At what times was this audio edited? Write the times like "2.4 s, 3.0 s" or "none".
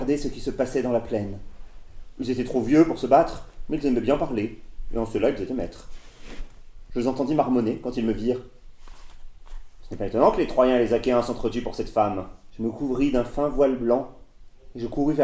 6.9 s, 12.5 s

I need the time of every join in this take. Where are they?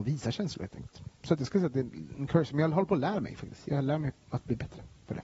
1.2 s

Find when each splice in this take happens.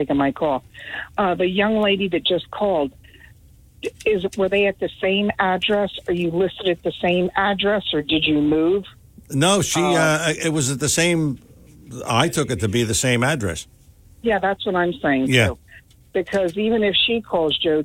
none

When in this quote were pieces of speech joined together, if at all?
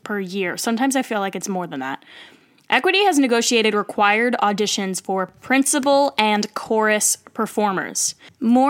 none

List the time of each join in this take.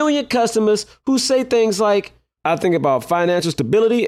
2.4 s

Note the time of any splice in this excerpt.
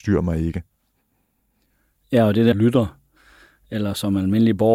2.5 s

